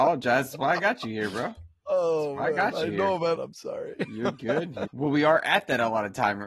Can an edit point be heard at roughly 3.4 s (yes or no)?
yes